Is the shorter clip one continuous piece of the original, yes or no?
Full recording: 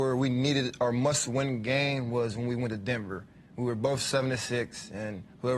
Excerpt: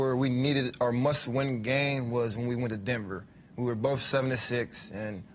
yes